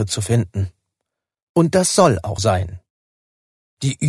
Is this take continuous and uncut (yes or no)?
no